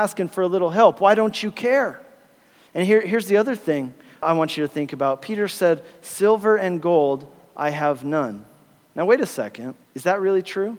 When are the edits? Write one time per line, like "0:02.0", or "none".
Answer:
0:09.8